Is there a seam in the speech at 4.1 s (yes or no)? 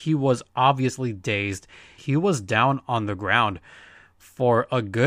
no